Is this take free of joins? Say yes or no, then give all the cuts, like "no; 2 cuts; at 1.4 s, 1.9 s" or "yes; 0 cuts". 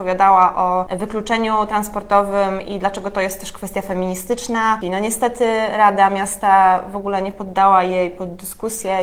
no; 1 cut; at 4.8 s